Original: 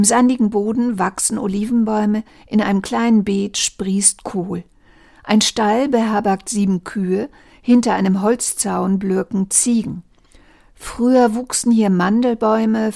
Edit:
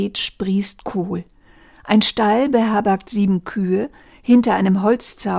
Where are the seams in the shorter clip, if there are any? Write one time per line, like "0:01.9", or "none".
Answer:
none

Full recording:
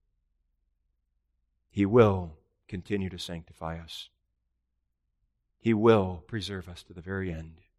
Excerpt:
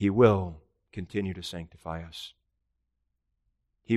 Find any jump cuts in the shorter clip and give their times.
none

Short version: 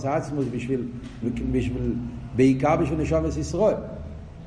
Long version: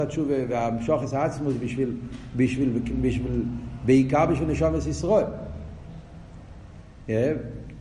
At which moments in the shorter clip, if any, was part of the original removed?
0:01.2

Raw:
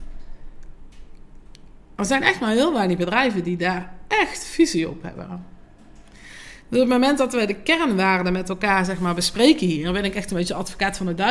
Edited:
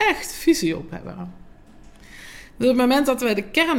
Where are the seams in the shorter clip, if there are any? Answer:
none

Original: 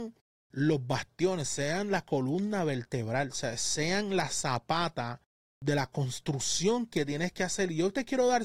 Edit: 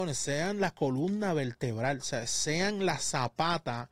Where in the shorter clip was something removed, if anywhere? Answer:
none

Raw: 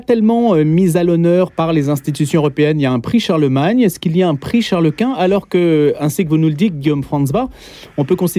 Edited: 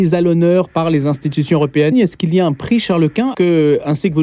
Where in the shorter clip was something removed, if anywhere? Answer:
0:01.9
0:03.3

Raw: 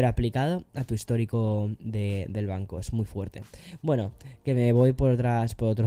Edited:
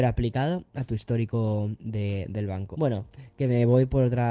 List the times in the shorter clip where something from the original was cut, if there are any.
0:02.7

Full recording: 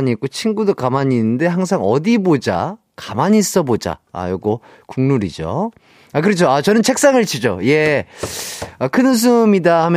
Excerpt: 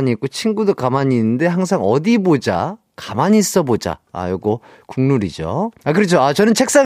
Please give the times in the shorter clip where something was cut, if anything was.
0:05.8

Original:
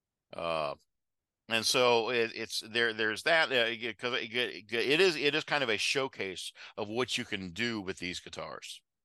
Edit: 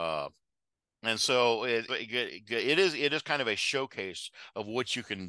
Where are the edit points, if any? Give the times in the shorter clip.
0:01.9

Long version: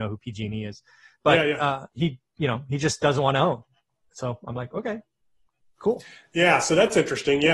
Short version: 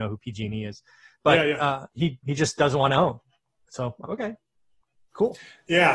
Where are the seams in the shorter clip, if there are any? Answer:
0:02.2
0:04.0

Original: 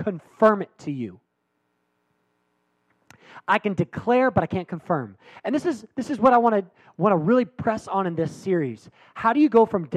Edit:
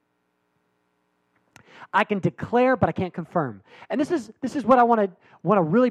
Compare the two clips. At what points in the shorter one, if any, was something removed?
none

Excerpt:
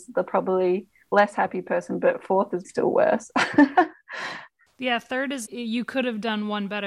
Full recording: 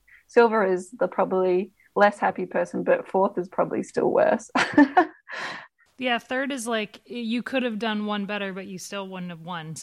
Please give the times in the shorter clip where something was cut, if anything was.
0:02.6
0:05.4

